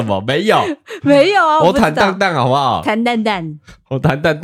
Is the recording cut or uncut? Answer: uncut